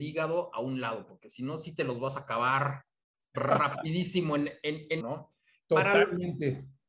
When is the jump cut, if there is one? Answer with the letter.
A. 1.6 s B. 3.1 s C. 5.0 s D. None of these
C